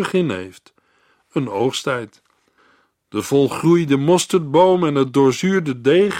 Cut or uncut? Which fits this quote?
cut